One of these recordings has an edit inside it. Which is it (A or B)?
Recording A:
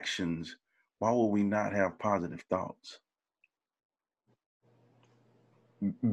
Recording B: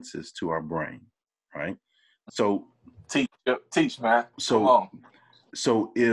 B